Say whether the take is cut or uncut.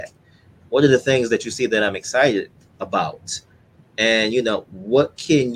uncut